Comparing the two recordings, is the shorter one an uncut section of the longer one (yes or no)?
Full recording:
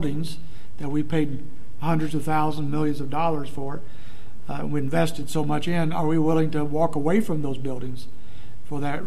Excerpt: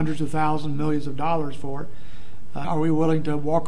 no